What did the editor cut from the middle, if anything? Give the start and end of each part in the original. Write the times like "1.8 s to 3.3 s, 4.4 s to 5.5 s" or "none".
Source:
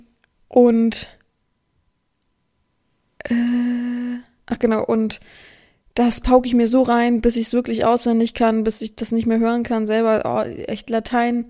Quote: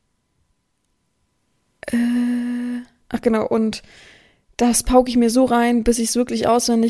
none